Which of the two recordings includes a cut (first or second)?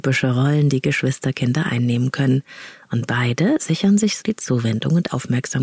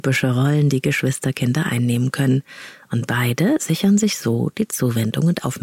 first